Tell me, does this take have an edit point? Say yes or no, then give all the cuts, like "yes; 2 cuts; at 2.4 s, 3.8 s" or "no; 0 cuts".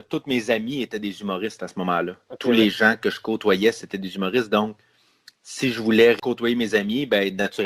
no; 0 cuts